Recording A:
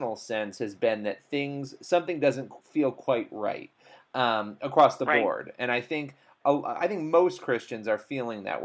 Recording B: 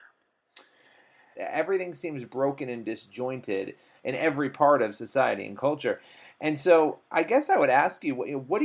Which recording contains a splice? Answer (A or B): B